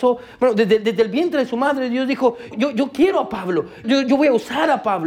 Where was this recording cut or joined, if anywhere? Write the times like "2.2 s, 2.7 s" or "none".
2.5 s, 3.8 s